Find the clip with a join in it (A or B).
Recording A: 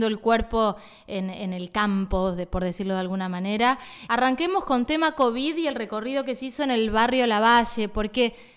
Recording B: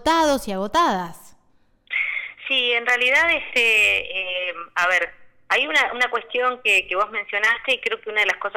A